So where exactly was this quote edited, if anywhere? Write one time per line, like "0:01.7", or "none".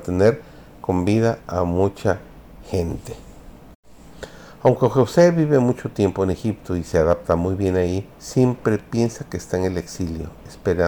0:08.1